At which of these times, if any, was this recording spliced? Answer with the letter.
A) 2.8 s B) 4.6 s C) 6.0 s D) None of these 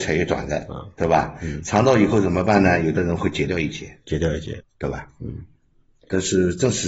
B